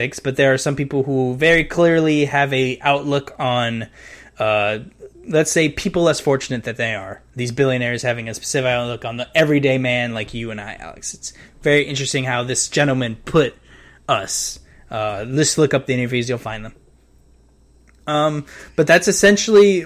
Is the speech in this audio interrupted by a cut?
no; 0 cuts

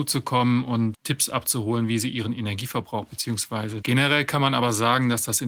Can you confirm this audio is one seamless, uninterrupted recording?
no; 2 cuts; at 0.9 s, 3.8 s

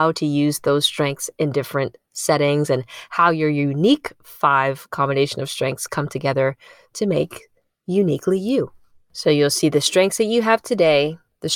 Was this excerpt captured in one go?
yes; 0 cuts

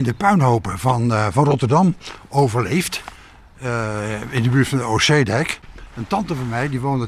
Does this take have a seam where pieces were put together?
no; 0 cuts

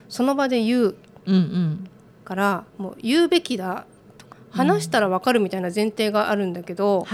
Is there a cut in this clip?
yes; 2 cuts; at 2.7 s, 4.3 s

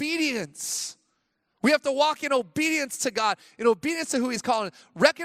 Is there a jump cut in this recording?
no; 0 cuts

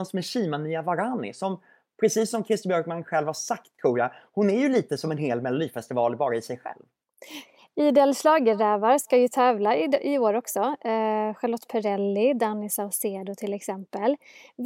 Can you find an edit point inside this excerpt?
no; 0 cuts

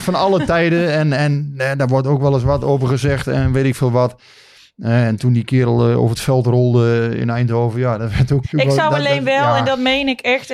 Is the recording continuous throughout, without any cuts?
no; 1 cut; at 8.4 s

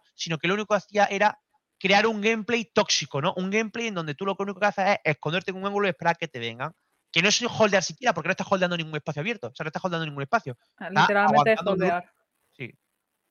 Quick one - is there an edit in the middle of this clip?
no; 0 cuts

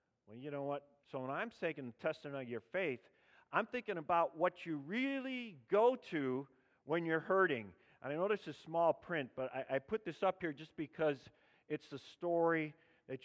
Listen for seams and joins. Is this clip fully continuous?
no; 1 cut; at 1.0 s

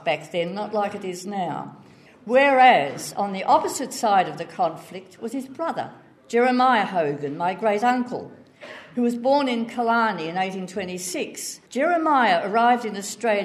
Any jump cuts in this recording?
yes; 2 cuts; at 2.1 s, 11.7 s

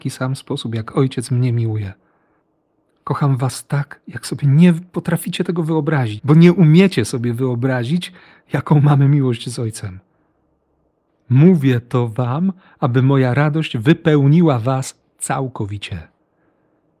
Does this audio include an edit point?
yes; 2 cuts; at 6.2 s, 11.1 s

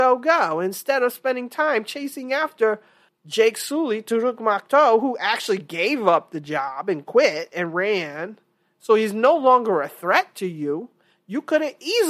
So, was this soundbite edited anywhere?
no; 0 cuts

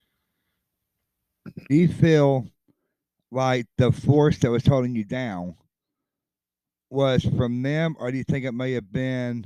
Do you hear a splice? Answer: yes; 1 cut; at 1.7 s

